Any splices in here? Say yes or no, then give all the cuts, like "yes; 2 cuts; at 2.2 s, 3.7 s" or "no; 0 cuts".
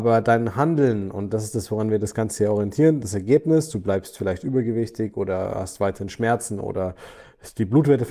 no; 0 cuts